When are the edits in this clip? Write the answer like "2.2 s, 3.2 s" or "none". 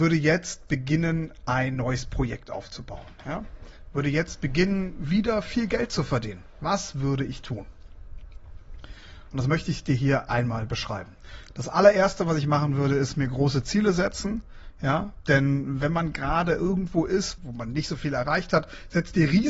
17.4 s